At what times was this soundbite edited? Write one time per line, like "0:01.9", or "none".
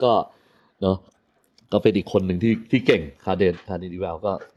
none